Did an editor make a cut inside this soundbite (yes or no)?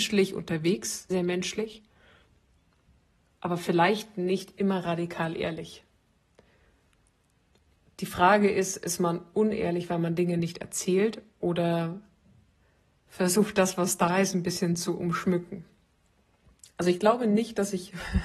yes